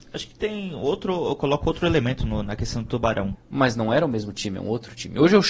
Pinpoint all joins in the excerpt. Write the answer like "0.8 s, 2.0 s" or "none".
3.3 s